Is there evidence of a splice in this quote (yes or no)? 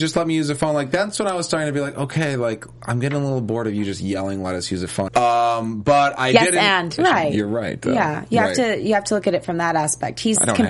yes